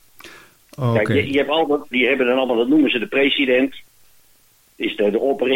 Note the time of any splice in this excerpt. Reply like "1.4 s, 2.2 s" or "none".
1.9 s